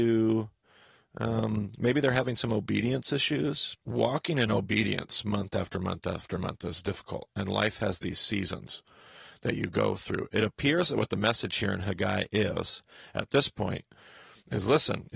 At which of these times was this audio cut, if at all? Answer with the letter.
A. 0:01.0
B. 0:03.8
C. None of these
B